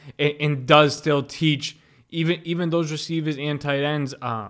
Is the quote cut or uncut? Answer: uncut